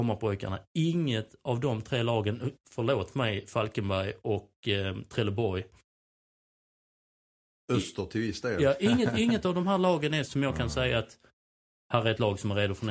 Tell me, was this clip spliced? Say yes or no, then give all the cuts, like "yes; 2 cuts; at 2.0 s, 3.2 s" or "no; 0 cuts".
yes; 1 cut; at 10.3 s